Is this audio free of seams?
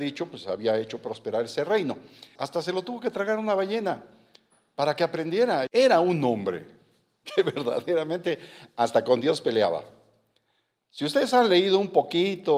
no; 2 cuts; at 2.4 s, 5.7 s

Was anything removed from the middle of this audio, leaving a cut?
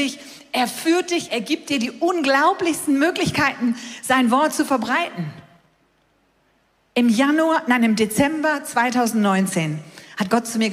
yes; 1 cut; at 1.3 s

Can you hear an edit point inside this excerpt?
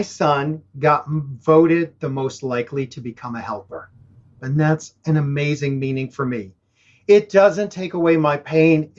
yes; 1 cut; at 4.4 s

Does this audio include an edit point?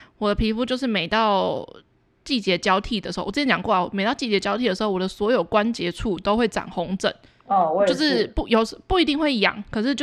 no; 0 cuts

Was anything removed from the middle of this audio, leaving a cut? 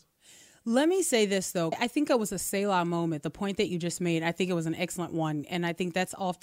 yes; 1 cut; at 1.7 s

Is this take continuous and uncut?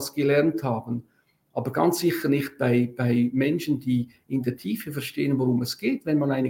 yes; 0 cuts

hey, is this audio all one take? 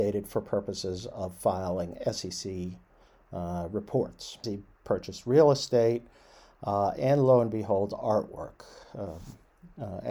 no; 1 cut; at 4.4 s

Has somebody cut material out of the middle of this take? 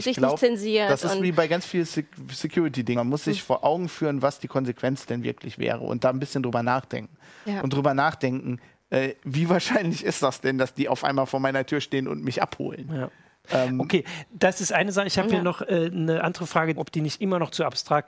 yes; 2 cuts; at 2.9 s, 16.8 s

